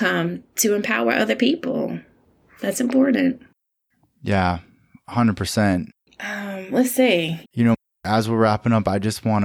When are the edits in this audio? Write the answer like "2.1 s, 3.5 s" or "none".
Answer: 6.0 s, 7.4 s